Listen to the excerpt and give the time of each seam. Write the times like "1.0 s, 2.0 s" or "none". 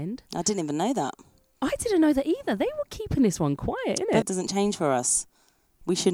4.2 s